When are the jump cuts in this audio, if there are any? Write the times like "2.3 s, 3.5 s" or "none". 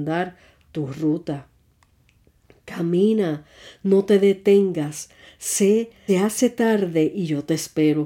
6.1 s

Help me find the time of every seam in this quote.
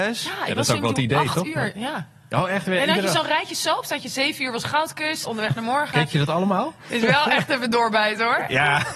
5.2 s, 6.9 s

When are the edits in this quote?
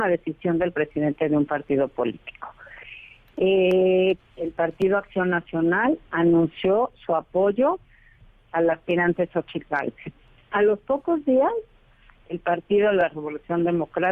4.2 s

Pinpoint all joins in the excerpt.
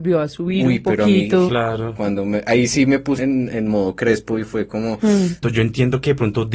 1.5 s, 3.2 s, 5.4 s

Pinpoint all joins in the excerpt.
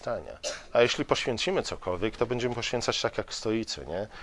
none

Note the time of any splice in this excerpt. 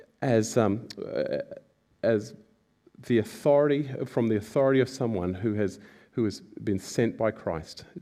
none

